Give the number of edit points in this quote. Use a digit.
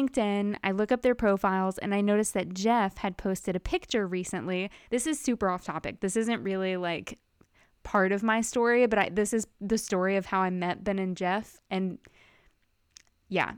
0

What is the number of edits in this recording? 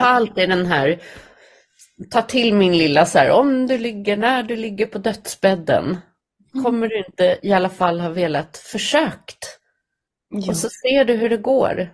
0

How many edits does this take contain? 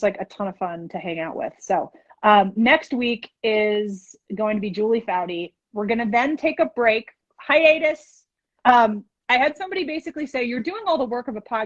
1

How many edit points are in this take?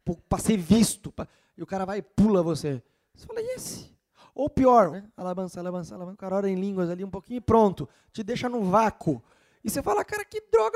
1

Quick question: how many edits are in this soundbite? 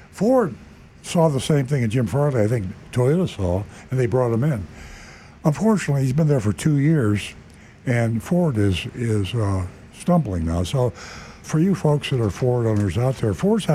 1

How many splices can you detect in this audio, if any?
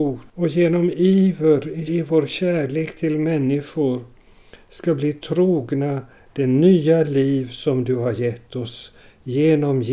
1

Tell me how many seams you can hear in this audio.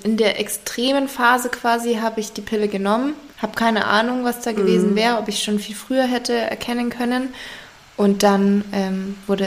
1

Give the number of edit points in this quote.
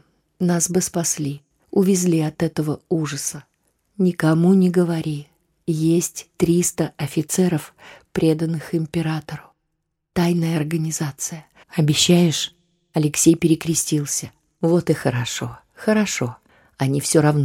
1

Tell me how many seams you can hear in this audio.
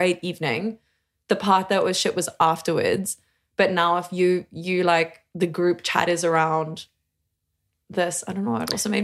0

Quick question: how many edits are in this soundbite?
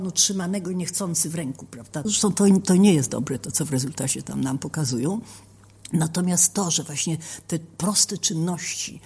1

